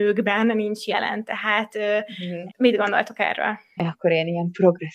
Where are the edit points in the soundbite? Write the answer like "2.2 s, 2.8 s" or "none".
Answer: 2.5 s, 3.8 s

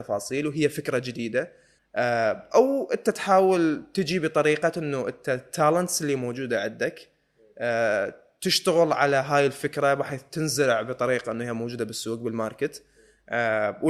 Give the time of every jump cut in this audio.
1.8 s

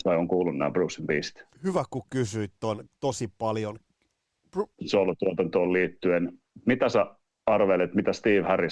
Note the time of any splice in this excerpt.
1.5 s, 2.9 s, 4.7 s

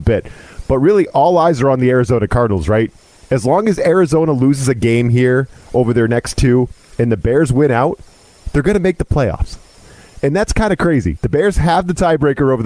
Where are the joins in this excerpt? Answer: none

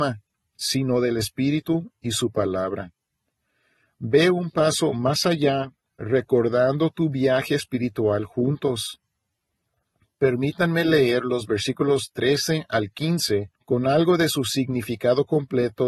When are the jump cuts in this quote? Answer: 5.9 s, 13.6 s

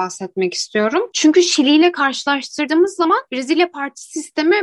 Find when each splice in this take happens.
none

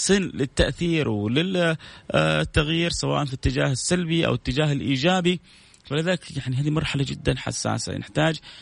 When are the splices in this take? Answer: none

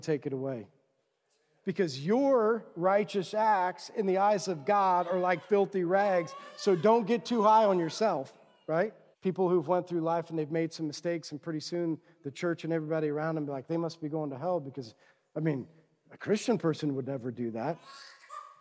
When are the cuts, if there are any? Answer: 1.6 s, 9.1 s

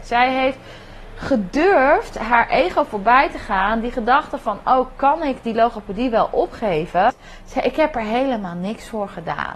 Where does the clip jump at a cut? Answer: 7.1 s

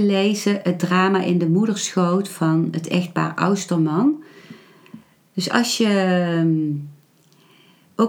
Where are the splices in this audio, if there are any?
5.3 s

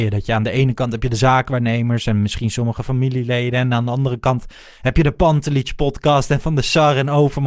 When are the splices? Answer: none

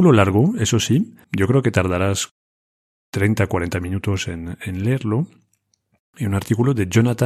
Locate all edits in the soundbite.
1.2 s

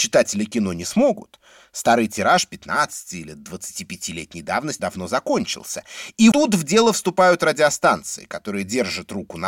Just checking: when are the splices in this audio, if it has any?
4.8 s, 6.3 s

